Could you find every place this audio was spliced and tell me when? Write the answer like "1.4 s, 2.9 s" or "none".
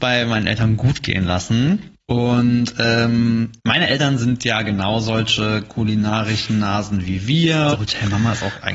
2.0 s, 3.6 s, 7.7 s